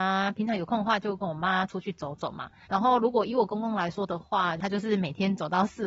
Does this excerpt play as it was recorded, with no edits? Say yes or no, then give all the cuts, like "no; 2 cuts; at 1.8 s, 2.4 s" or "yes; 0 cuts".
no; 1 cut; at 2.6 s